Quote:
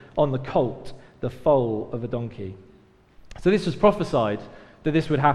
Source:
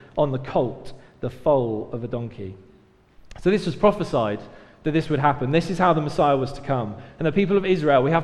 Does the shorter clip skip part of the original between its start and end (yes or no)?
no